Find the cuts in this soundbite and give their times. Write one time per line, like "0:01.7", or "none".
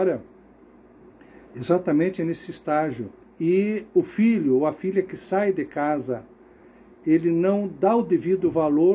0:03.2